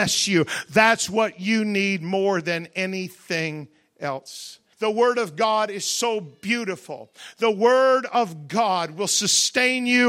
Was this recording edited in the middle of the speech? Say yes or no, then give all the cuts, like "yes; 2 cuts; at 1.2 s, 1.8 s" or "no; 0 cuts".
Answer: yes; 1 cut; at 4.7 s